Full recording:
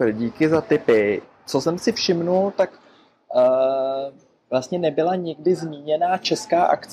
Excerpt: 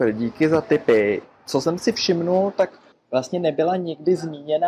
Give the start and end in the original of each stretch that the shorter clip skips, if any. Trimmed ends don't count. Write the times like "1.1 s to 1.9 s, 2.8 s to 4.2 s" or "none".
2.9 s to 4.3 s